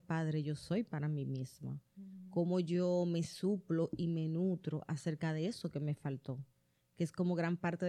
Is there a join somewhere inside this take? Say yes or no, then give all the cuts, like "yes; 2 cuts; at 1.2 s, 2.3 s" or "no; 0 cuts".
no; 0 cuts